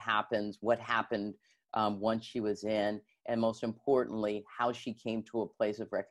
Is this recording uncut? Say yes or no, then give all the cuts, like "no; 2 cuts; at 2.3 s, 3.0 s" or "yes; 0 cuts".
yes; 0 cuts